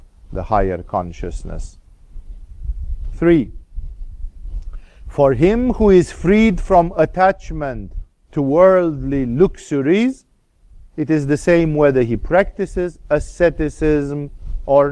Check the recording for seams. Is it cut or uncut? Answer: uncut